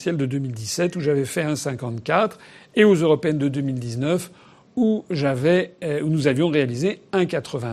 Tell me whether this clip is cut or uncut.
uncut